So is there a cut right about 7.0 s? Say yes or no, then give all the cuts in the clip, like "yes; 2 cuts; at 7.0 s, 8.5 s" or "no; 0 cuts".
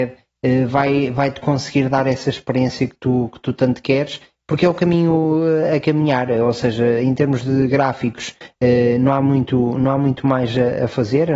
no; 0 cuts